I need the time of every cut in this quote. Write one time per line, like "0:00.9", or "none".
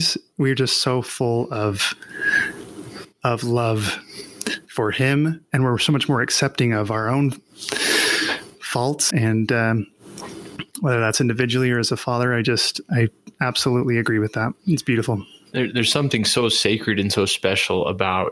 0:05.4
0:09.1
0:12.8